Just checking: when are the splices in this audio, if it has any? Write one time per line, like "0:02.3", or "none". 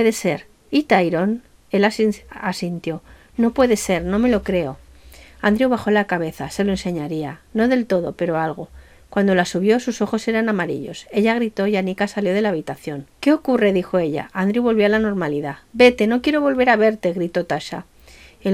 0:13.1

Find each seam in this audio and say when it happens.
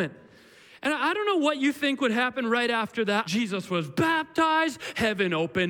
0:03.2

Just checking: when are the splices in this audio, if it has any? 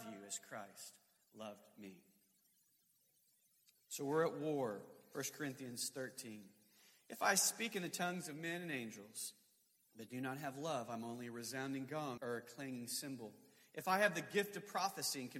0:12.2

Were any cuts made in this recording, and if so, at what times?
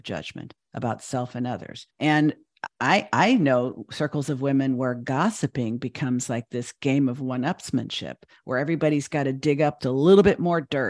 0:01.9
0:09.8

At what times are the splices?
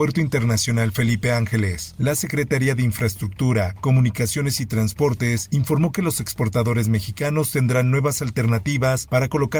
none

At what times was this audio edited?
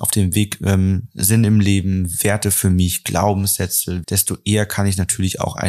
0:04.0

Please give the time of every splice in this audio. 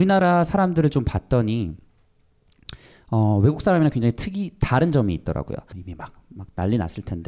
0:05.7

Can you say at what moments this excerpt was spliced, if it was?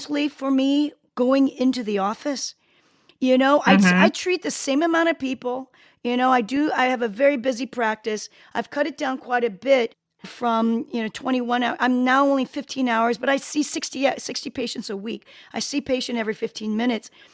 none

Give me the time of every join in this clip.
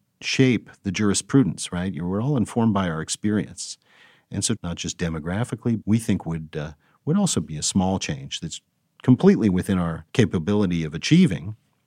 0:04.6
0:05.8
0:10.1

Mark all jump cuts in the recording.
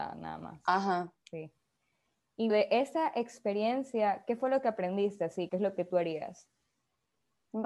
0:02.5
0:05.5

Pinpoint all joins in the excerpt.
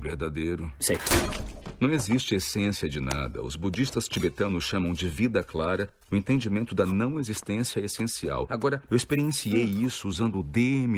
0:08.9

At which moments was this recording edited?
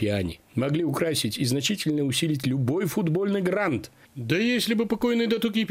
0:04.1

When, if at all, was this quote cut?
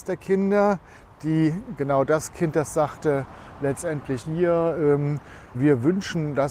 0:04.2
0:05.5

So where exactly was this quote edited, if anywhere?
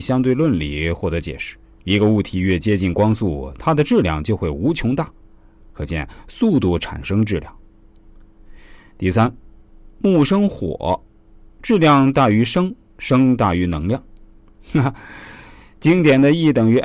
0:01.8

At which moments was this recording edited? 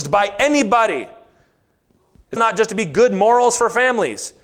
0:02.4

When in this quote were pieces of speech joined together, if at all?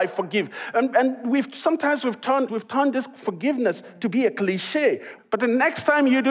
0:02.5
0:05.2

